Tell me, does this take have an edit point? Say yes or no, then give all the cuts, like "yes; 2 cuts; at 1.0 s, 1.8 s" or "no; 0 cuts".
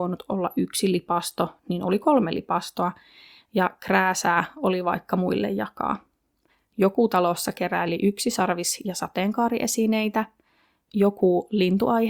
no; 0 cuts